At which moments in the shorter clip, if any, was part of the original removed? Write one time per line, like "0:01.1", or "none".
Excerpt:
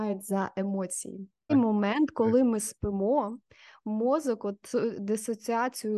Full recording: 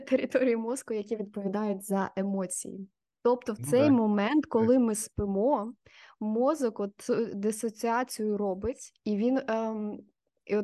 0:01.5

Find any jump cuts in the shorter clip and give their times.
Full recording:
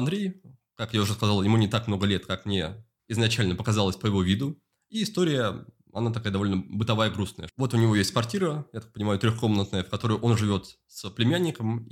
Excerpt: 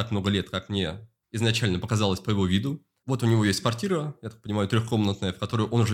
0:03.0

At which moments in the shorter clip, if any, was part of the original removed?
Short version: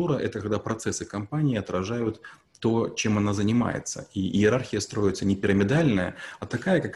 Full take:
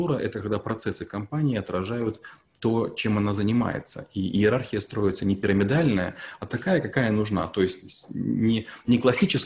none

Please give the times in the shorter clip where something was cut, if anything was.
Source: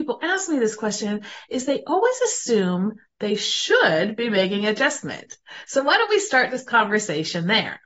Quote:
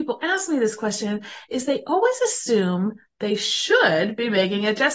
none

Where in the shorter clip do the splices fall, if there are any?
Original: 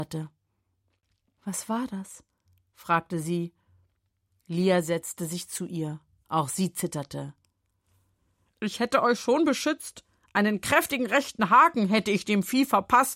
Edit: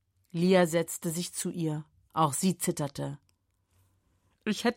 none

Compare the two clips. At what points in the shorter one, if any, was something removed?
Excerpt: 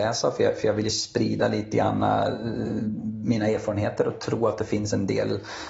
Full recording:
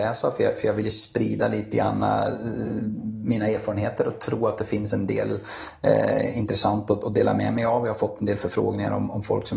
none

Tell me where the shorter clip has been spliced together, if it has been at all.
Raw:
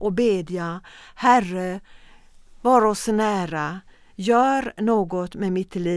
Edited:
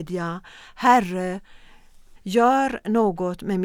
0:02.2

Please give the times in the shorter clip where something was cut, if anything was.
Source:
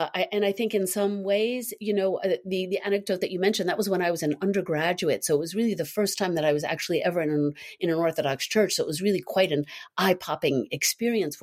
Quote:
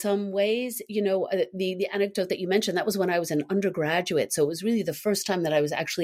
none

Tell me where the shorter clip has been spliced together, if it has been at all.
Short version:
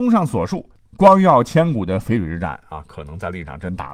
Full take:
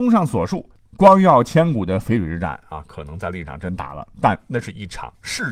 none

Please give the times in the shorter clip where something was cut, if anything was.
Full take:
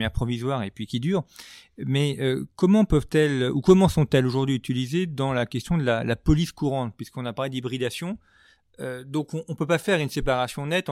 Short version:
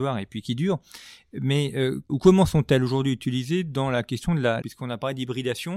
0:02.1
0:04.6

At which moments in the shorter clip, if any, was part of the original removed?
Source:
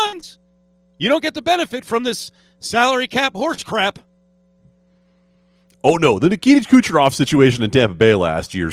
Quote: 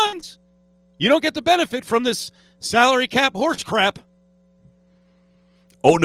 none

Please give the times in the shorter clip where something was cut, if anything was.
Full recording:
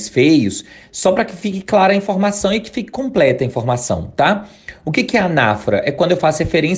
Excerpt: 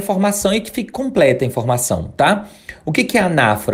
none

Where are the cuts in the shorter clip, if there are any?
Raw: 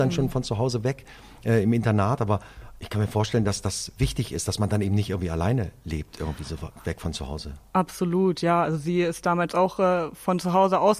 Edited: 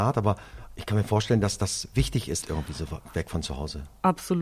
0:02.4

